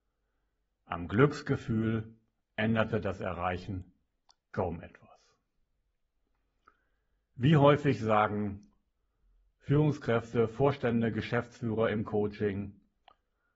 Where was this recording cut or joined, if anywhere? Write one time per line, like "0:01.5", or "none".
none

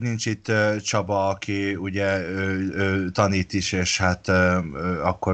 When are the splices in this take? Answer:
none

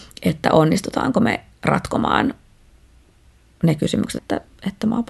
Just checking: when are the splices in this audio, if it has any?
0:04.2

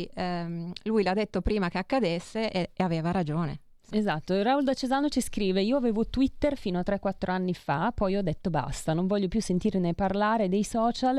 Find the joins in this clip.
0:03.9

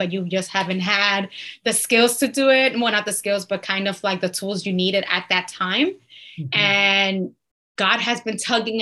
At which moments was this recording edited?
none

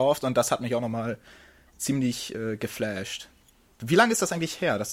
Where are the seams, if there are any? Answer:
none

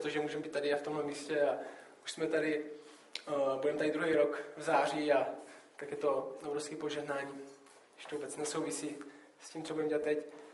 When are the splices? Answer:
none

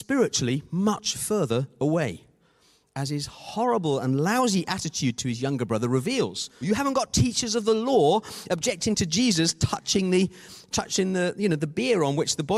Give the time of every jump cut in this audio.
0:06.6

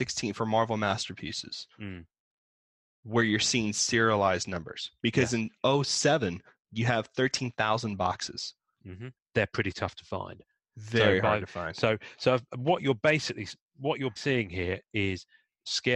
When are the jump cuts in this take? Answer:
0:09.2
0:14.2

